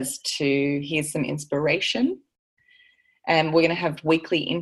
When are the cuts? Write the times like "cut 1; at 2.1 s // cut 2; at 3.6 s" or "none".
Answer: none